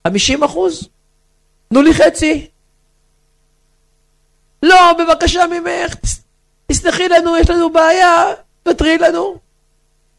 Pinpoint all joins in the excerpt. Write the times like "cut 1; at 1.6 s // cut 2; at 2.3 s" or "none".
none